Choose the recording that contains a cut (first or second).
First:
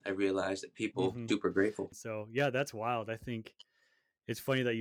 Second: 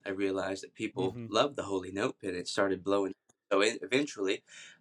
first